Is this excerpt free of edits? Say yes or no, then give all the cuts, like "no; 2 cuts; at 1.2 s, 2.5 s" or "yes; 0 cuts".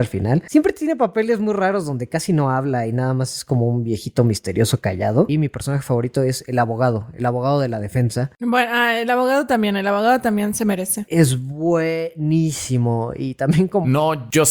no; 1 cut; at 5.3 s